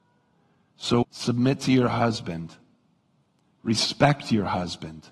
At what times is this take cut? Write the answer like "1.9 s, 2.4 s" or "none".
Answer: 1.0 s